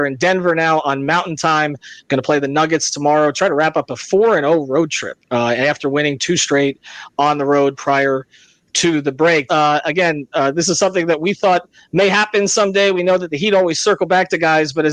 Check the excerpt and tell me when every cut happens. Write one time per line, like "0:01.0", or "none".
0:09.5